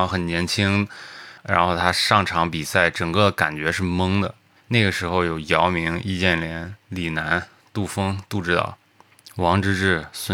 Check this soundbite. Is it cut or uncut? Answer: cut